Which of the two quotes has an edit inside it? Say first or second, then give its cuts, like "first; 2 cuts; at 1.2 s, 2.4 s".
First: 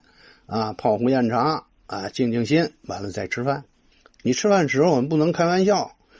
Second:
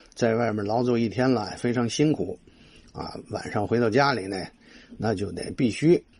first; 1 cut; at 4.2 s